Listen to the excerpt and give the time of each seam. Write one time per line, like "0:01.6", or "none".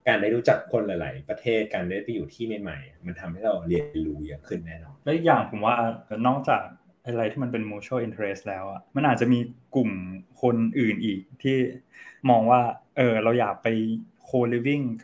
0:06.1
0:08.9
0:12.2